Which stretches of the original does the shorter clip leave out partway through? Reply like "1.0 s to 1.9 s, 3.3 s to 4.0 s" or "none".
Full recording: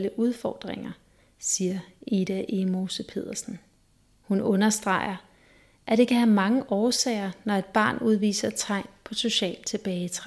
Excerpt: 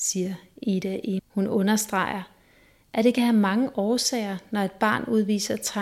2.6 s to 4.1 s